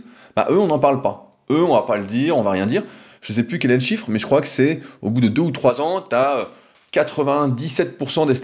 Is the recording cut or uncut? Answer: uncut